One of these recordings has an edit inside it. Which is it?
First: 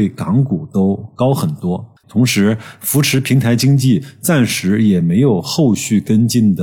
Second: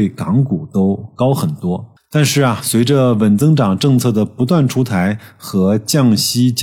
first; 1 cut; at 2.0 s

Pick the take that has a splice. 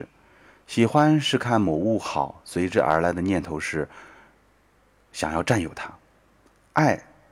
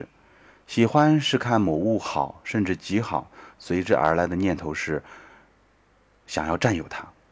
first; 1 cut; at 2.4 s

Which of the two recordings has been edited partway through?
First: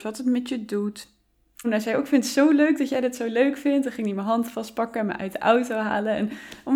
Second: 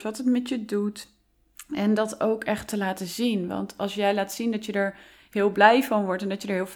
first; 1 cut; at 1.6 s

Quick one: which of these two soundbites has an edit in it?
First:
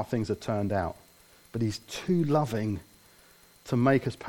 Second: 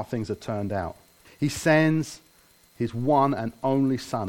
second; 1 cut; at 1.2 s

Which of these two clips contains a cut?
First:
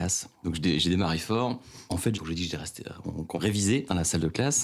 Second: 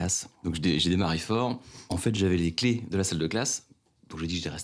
first; 2 cuts; at 2.1 s, 3.3 s

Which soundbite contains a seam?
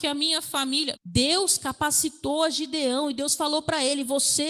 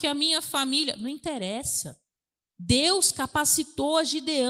first; 1 cut; at 1.0 s

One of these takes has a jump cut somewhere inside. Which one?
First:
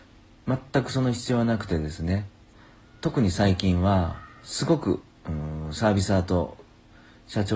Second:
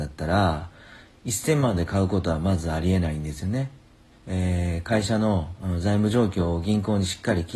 second; 1 cut; at 4.1 s

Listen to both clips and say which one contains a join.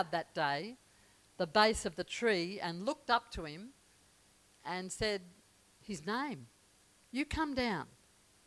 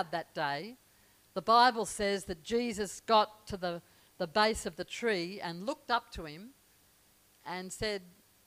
first; 2 cuts; at 1.3 s, 7.0 s

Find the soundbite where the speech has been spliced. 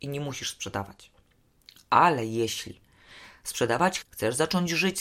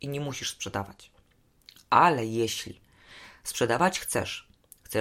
first; 1 cut; at 4.0 s

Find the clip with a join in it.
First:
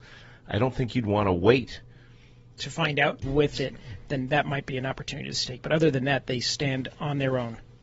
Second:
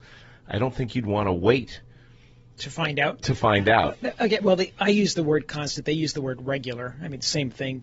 first; 1 cut; at 3.2 s

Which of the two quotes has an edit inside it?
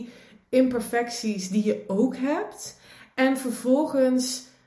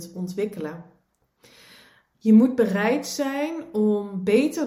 second; 1 cut; at 2.1 s

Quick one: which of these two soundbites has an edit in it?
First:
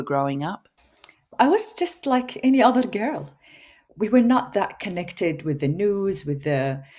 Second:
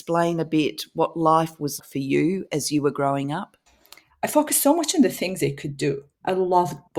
second; 2 cuts; at 1.8 s, 4.1 s

